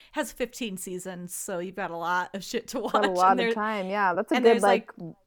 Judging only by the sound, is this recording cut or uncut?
uncut